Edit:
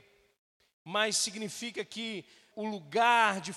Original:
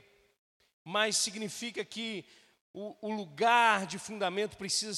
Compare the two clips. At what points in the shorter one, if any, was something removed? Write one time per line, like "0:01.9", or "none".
0:02.5